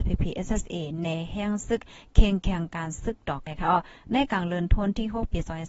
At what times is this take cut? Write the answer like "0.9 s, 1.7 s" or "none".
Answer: 3.5 s